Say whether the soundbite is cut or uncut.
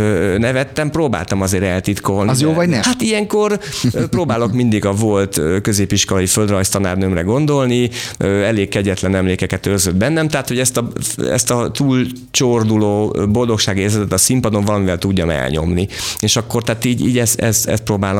cut